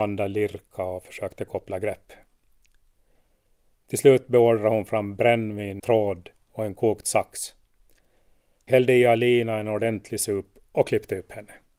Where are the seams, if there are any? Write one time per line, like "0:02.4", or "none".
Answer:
0:05.8